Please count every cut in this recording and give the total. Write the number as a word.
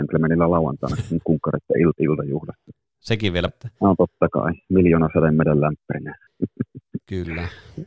two